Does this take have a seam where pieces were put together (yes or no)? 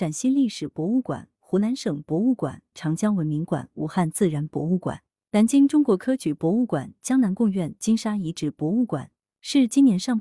yes